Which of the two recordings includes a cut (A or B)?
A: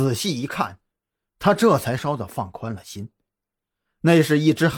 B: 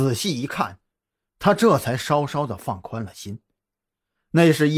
A